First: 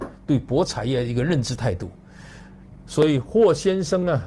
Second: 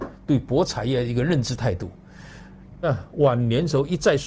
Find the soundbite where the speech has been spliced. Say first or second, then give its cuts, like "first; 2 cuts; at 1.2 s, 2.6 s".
second; 1 cut; at 2.8 s